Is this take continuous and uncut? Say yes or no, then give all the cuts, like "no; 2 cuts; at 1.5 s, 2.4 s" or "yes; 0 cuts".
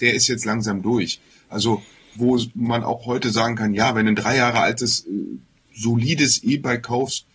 no; 1 cut; at 2.1 s